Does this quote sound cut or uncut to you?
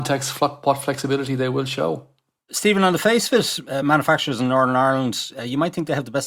uncut